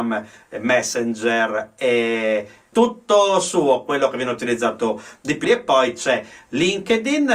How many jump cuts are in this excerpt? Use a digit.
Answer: 2